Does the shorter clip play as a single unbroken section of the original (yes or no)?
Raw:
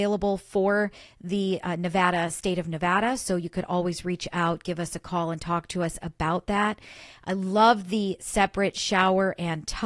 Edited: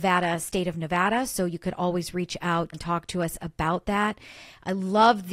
no